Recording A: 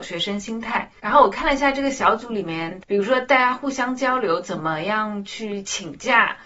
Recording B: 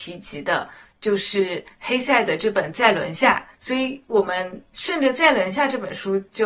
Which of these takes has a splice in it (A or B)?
A